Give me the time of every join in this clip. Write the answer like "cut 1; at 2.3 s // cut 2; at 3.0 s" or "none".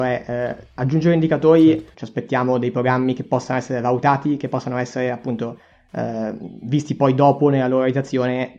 cut 1; at 1.9 s